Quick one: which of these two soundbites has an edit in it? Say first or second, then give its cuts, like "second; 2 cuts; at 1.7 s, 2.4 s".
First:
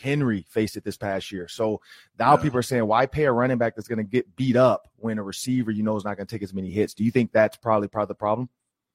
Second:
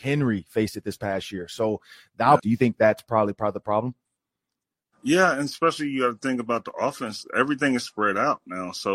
second; 1 cut; at 2.4 s